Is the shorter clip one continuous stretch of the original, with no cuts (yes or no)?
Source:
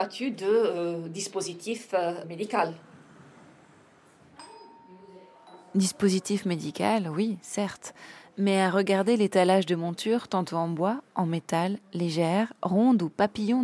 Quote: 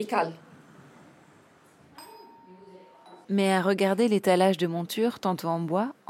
no